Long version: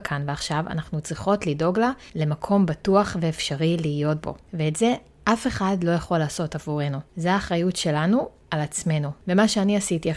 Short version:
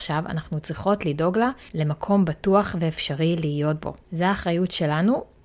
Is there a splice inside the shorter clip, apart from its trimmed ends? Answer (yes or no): yes